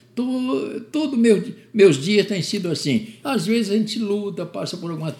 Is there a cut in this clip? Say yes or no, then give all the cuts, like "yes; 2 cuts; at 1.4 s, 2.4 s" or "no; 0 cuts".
yes; 1 cut; at 3.2 s